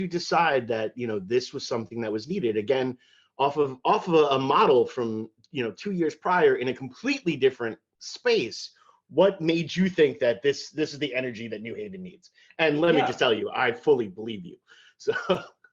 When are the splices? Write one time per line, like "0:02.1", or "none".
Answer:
none

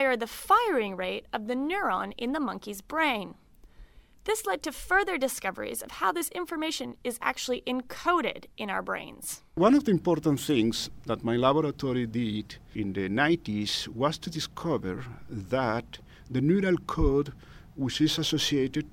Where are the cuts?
none

